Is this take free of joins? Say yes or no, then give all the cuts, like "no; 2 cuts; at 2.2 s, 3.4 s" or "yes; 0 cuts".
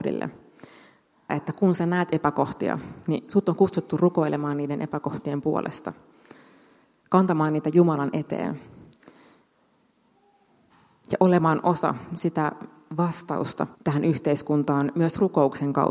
no; 2 cuts; at 1.3 s, 13.7 s